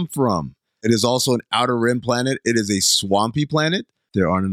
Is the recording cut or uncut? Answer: uncut